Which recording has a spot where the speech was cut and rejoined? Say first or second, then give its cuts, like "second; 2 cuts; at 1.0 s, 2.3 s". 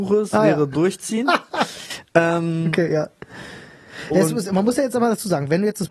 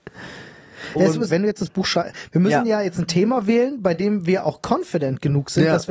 second; 1 cut; at 1.3 s